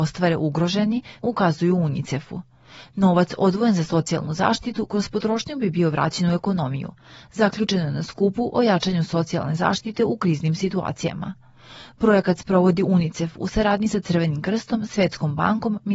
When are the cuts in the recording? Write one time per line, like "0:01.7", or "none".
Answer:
0:01.2